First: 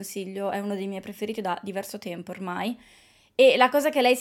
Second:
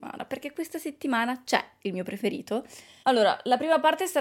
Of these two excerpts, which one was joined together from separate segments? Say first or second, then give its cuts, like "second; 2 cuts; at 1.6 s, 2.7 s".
second; 1 cut; at 3.0 s